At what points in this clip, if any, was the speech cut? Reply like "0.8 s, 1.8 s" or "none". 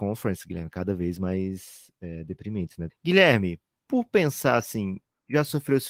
2.9 s